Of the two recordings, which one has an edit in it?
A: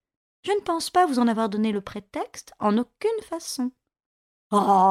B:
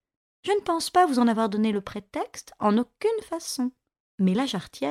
B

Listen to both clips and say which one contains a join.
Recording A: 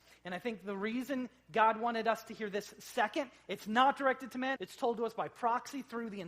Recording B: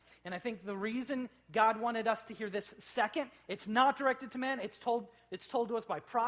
A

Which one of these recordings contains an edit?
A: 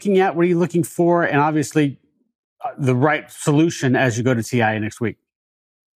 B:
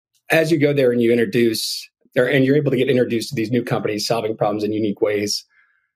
B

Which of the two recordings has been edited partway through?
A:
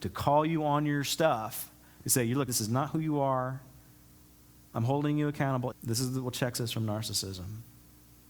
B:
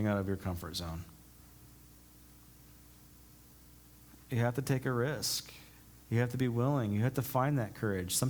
A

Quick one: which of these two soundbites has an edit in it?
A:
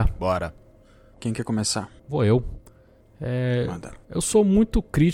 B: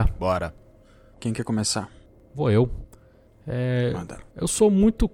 A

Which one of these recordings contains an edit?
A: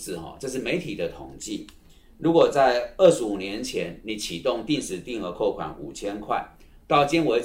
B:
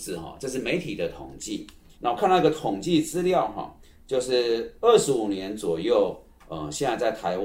B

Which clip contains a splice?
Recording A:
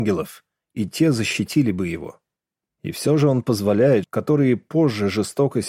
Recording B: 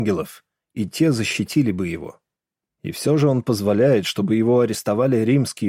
A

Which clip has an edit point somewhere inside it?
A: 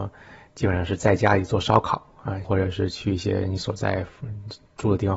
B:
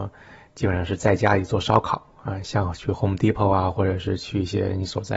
A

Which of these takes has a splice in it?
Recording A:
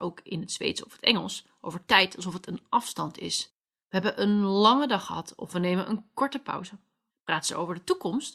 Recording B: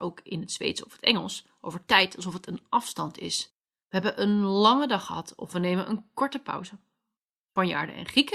A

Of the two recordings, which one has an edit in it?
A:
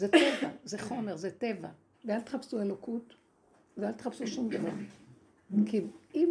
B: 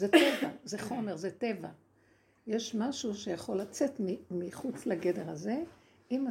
A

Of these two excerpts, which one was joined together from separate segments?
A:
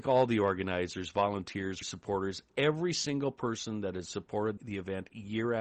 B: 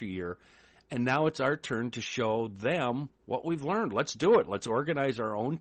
A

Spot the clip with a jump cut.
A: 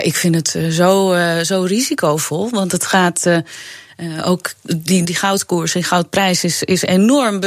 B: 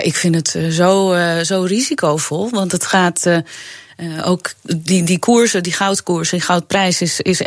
A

